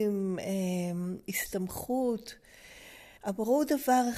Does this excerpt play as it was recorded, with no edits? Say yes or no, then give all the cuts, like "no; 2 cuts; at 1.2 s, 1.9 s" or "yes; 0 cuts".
no; 1 cut; at 3.2 s